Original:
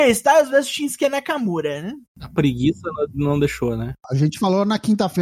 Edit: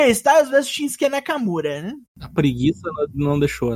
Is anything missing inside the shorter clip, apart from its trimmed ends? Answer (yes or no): no